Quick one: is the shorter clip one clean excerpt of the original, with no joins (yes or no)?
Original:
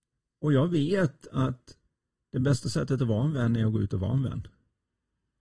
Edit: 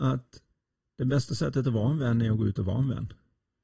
yes